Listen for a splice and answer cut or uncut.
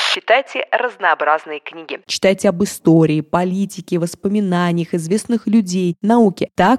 cut